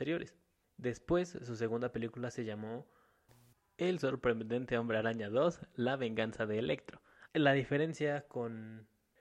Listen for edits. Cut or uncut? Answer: cut